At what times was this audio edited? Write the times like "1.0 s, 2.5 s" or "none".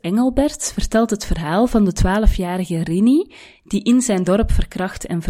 none